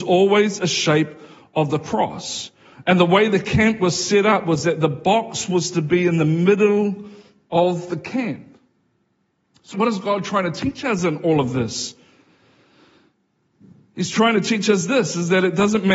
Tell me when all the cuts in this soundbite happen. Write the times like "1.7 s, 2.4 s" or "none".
9.7 s